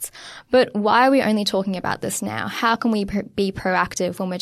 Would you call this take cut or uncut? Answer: uncut